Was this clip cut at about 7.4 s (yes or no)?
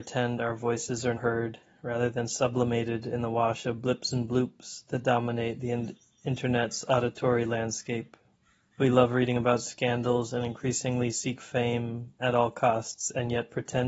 no